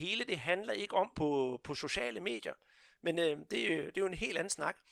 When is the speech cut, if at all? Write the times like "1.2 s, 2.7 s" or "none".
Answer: 1.1 s